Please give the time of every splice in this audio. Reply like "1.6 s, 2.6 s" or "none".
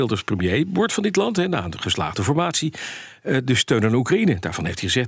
none